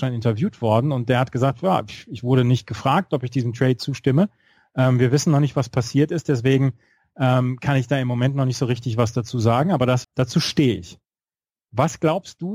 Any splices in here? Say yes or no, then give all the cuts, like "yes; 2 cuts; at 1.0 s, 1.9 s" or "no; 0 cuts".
yes; 1 cut; at 10.0 s